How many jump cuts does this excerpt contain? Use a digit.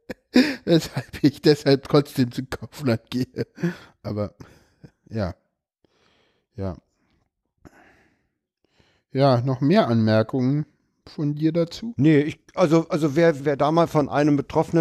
1